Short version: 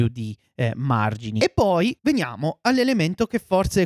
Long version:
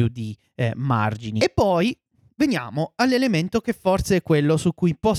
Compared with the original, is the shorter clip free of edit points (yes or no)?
no